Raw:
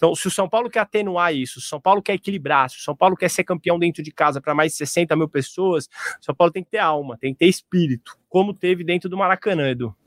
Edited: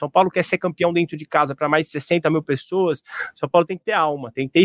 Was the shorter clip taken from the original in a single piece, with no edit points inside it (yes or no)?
yes